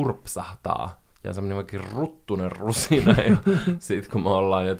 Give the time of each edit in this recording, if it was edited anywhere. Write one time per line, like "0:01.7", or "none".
none